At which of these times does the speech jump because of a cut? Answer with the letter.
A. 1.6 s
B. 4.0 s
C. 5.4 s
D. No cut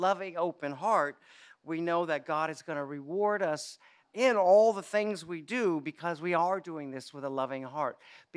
B